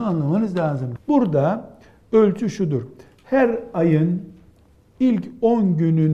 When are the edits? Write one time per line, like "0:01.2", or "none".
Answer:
0:01.0